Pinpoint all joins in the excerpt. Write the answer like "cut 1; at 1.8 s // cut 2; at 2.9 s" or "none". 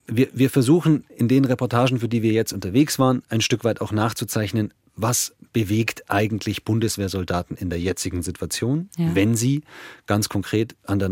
none